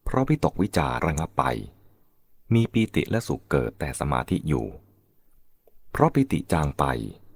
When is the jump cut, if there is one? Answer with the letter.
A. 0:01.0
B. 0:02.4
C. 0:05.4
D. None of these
A